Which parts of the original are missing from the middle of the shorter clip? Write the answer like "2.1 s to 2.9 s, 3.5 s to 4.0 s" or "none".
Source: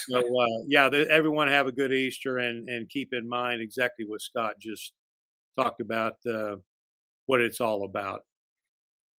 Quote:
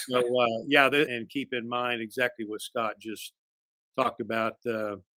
1.1 s to 2.7 s